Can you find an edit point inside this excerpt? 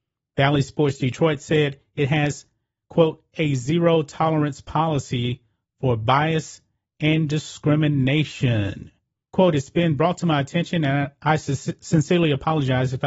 yes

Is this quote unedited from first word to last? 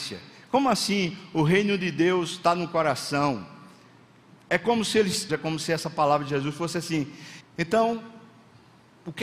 no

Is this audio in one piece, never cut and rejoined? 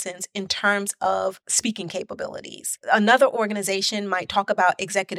yes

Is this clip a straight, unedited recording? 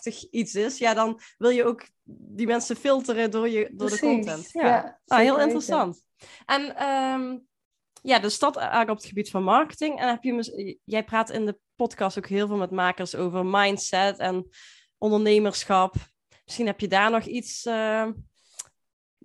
no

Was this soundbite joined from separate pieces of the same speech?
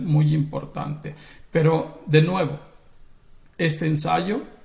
no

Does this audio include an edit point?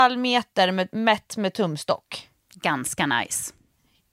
no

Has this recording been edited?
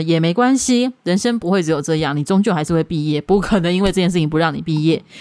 no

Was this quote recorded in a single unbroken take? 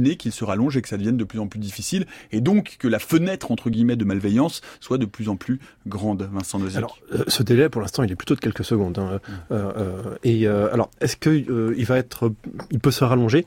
yes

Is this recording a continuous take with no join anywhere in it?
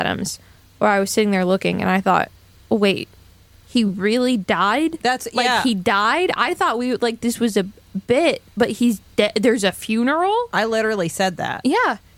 yes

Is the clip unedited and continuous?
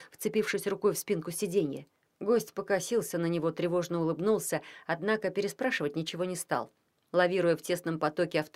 no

